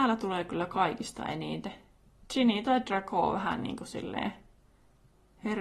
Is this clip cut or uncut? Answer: uncut